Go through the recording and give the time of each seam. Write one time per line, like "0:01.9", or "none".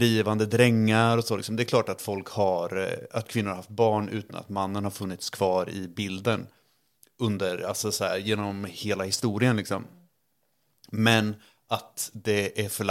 none